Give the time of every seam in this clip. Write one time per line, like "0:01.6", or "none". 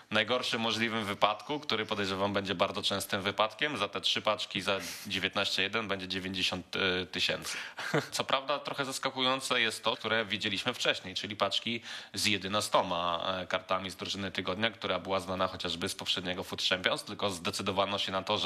0:08.1
0:09.9